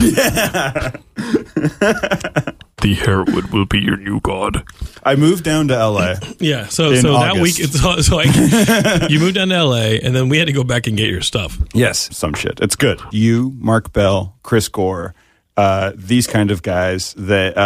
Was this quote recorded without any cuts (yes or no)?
no